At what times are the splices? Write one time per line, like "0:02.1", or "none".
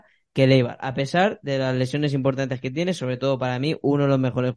none